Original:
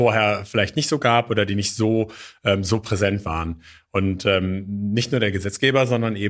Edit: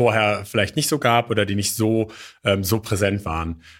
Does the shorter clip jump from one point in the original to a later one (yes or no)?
no